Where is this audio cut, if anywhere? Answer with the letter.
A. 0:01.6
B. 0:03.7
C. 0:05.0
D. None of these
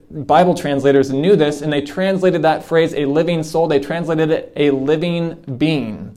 D